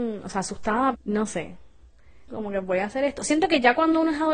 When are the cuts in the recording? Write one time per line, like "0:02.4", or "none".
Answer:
0:00.9
0:02.3